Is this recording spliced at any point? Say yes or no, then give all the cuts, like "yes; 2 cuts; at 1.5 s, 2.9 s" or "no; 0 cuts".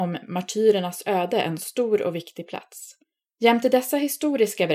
yes; 1 cut; at 3.4 s